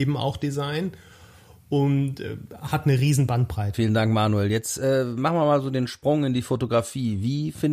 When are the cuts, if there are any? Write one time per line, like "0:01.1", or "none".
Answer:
0:03.7